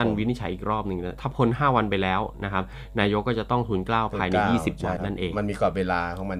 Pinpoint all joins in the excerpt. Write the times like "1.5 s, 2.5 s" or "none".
5.0 s